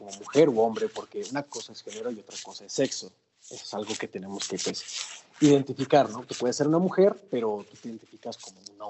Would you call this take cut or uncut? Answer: uncut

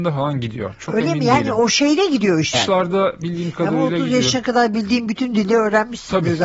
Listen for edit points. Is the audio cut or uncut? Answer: cut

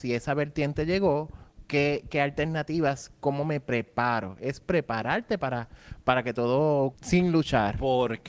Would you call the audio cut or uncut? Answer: cut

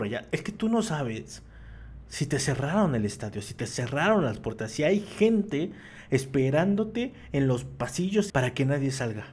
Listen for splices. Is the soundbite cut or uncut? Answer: cut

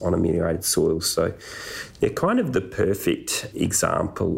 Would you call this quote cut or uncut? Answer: uncut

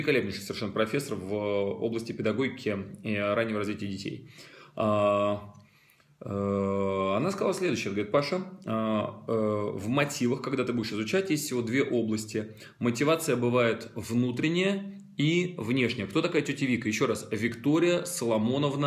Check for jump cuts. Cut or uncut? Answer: uncut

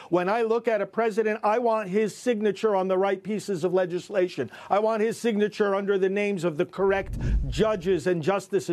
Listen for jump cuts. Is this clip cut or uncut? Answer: uncut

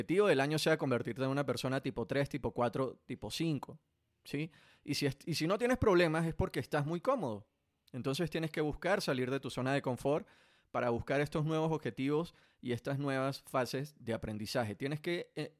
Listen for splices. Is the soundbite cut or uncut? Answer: uncut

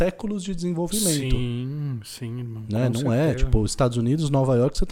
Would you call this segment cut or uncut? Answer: uncut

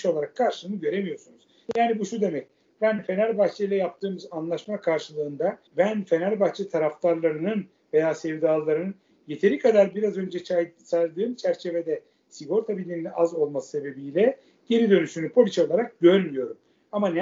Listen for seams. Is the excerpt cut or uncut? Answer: cut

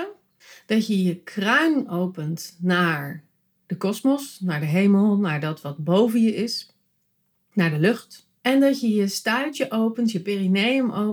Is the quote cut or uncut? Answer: cut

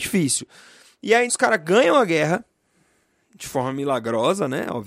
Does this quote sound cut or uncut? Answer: cut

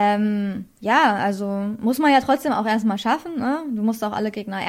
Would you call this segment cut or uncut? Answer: uncut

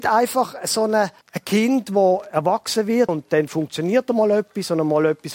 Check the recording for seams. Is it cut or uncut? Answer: cut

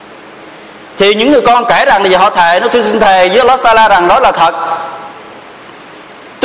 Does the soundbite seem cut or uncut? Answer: uncut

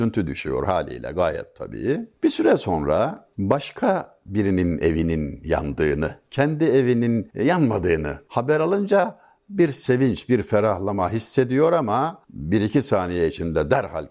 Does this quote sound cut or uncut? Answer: uncut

